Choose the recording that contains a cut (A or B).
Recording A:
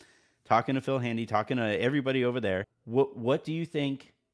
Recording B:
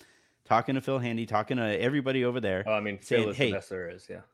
A